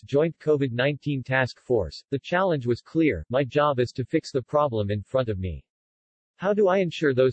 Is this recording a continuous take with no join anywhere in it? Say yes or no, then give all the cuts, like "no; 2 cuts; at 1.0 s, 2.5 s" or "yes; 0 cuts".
yes; 0 cuts